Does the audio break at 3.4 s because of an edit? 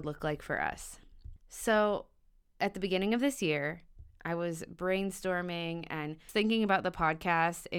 no; 2 cuts; at 1.4 s, 6.3 s

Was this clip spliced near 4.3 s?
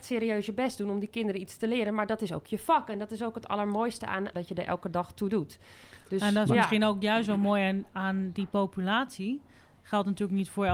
yes; 1 cut; at 4.3 s

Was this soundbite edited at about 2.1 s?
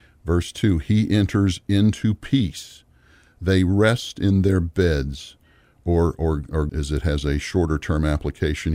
no; 1 cut; at 6.7 s

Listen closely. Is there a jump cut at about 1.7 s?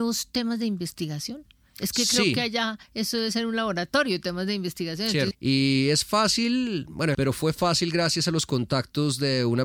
no; 2 cuts; at 5.3 s, 7.1 s

